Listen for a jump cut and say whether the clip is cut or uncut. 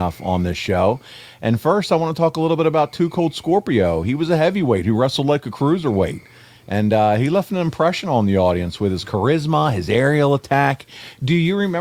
uncut